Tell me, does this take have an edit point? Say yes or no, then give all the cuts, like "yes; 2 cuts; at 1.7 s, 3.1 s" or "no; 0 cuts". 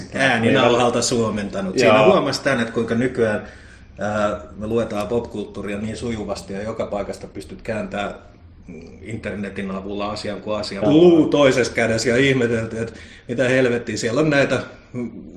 yes; 1 cut; at 10.8 s